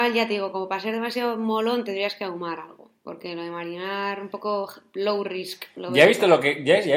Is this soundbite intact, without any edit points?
yes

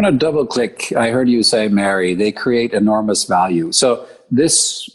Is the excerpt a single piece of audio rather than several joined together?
yes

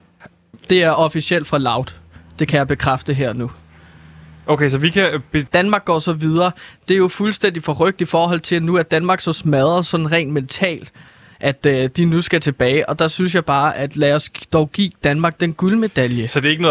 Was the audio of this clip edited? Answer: yes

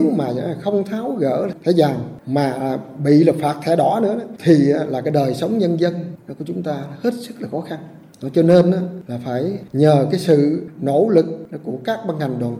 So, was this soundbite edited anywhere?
yes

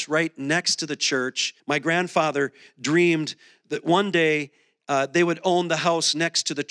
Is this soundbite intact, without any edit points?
no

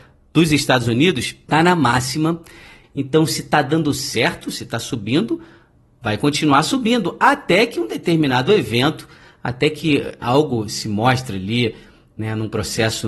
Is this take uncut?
no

